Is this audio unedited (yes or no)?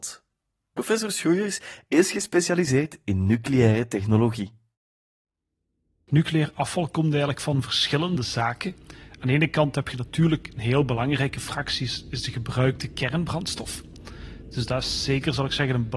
yes